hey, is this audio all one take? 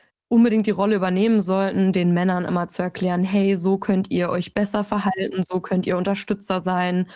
yes; 0 cuts

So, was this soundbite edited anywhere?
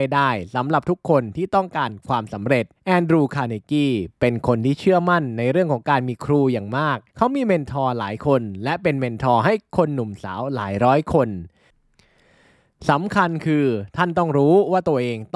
yes; 2 cuts; at 2.7 s, 7.1 s

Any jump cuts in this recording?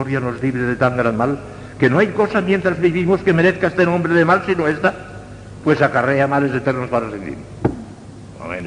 no; 0 cuts

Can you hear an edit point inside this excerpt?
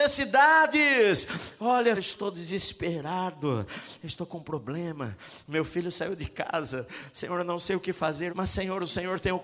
yes; 2 cuts; at 1.9 s, 8.3 s

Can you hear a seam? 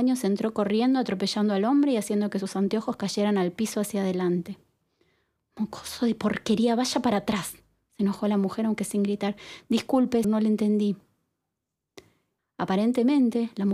yes; 2 cuts; at 10.2 s, 12.4 s

